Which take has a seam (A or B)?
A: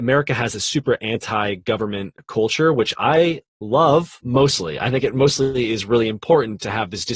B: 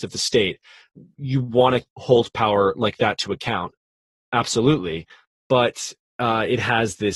B